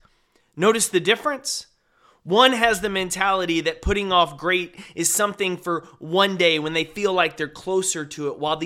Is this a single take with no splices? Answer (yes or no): yes